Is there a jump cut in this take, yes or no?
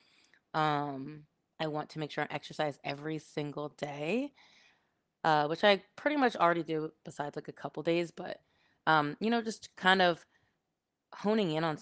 no